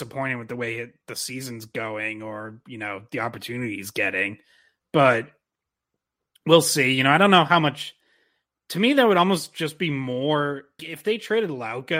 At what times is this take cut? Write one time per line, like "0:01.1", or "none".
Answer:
0:10.8